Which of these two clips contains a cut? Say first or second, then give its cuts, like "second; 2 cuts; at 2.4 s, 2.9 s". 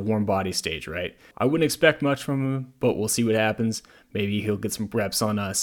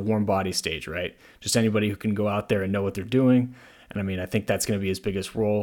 first; 1 cut; at 1.3 s